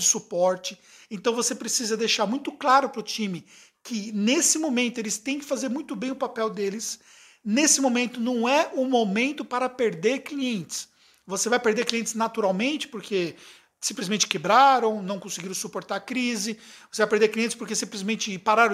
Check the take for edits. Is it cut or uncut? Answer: uncut